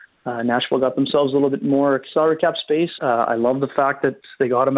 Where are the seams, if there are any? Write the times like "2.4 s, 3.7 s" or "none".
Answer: 3.0 s